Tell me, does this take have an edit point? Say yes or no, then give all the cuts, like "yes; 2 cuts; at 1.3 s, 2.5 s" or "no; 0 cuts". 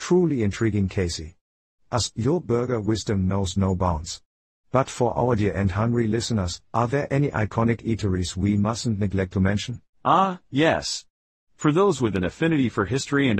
yes; 1 cut; at 2.1 s